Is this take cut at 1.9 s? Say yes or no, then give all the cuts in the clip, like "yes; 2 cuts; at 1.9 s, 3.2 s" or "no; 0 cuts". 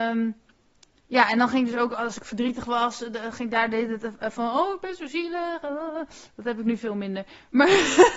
no; 0 cuts